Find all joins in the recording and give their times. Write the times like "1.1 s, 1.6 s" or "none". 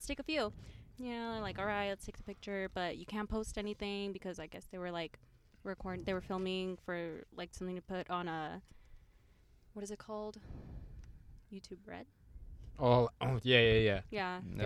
0.9 s